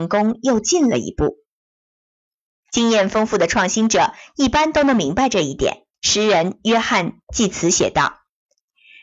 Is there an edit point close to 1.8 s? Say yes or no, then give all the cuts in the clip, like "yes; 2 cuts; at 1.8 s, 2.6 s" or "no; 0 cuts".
no; 1 cut; at 5.9 s